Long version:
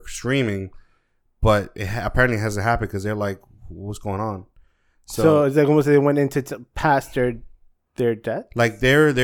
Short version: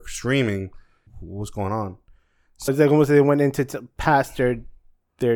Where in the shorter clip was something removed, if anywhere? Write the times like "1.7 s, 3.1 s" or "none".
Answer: 1.1 s, 2.7 s